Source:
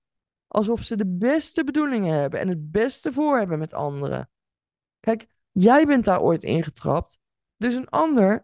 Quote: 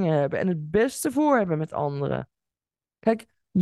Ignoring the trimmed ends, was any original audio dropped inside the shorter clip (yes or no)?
no